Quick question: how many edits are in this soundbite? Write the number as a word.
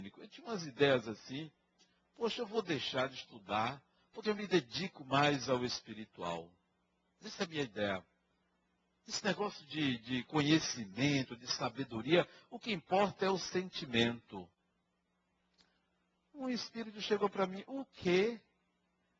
one